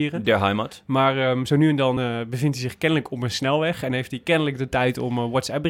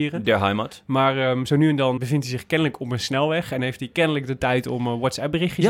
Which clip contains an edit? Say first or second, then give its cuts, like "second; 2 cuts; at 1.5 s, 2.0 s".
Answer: second; 1 cut; at 2.0 s